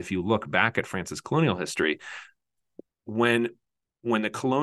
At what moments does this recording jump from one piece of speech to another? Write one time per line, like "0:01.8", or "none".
0:02.9

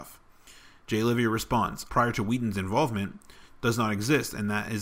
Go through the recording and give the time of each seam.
0:01.9

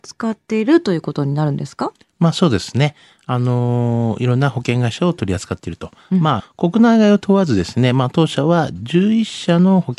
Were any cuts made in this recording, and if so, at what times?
0:06.4

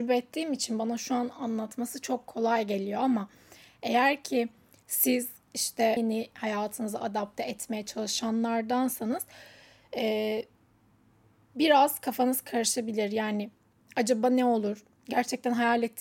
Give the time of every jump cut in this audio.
0:06.0

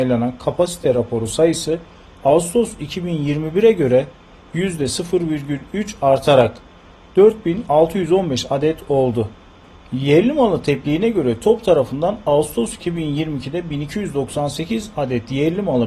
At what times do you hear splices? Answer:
none

